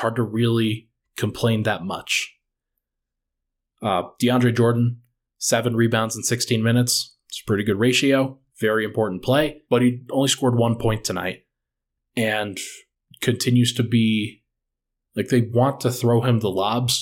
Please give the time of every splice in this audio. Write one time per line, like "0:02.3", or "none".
0:08.5
0:09.7